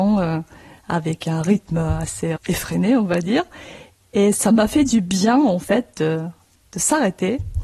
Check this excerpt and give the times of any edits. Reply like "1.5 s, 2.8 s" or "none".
2.4 s